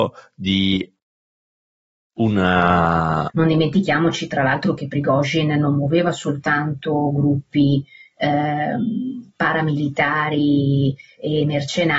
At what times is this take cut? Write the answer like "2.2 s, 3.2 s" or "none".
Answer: 3.3 s

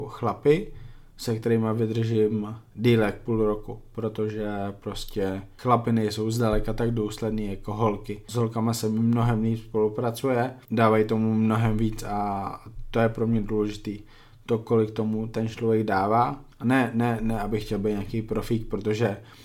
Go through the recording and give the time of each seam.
16.5 s

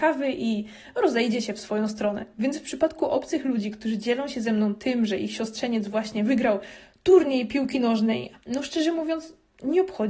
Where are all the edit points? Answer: 2.3 s, 8.3 s

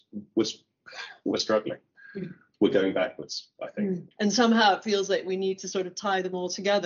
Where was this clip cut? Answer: 4.1 s

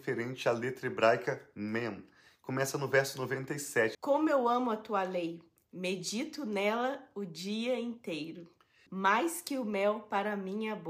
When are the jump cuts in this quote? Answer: 3.9 s, 8.9 s

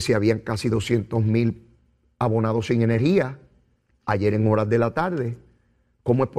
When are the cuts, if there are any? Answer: none

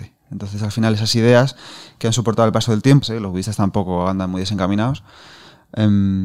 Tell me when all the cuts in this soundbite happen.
3.0 s

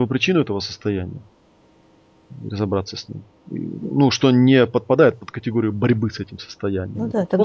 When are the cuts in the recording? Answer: none

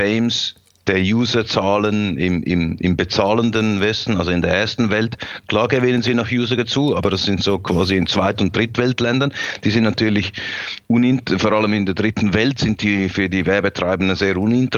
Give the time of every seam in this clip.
none

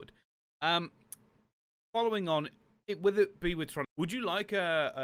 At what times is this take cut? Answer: 3.8 s

